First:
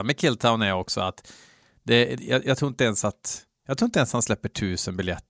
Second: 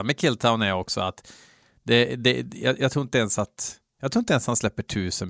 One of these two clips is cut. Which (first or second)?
first